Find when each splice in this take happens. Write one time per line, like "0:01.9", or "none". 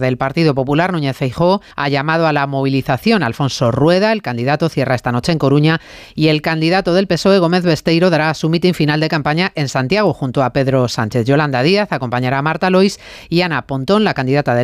0:01.7